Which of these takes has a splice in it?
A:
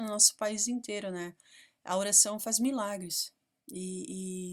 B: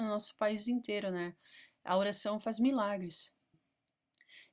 B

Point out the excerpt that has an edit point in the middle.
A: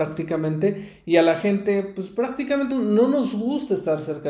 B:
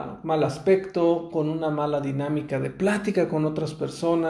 A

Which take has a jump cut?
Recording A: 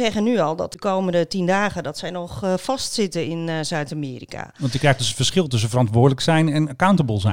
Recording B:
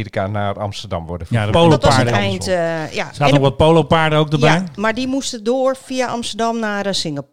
B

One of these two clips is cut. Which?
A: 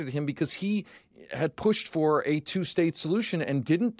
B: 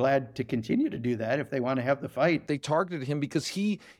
B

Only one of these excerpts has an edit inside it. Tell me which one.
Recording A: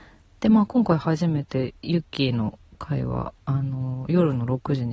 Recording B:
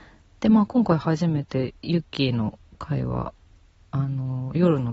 A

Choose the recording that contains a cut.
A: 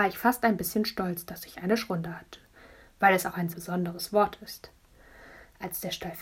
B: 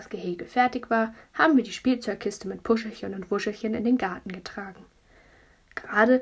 A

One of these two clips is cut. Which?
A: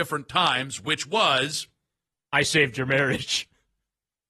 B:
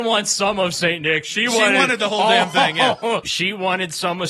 B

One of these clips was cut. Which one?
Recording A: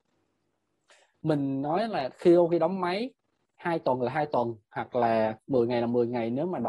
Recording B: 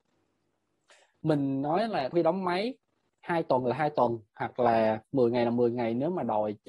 B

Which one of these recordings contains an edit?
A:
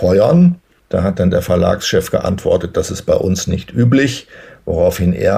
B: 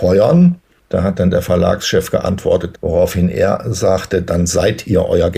B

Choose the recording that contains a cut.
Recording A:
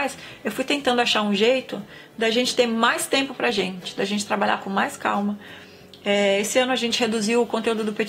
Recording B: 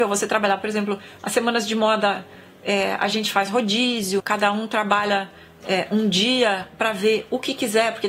B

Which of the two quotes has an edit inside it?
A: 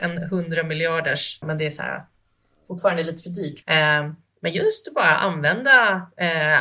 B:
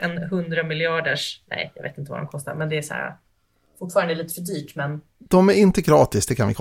A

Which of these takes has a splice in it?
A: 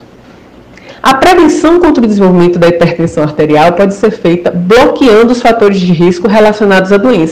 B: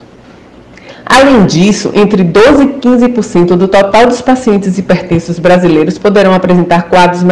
A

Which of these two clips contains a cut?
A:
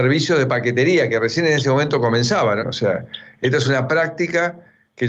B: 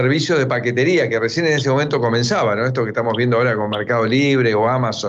A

